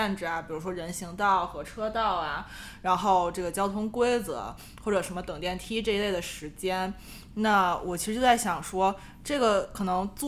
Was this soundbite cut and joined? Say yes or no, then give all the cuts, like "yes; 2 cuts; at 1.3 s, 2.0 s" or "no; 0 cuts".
no; 0 cuts